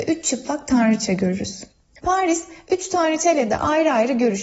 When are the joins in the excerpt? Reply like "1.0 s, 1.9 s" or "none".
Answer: none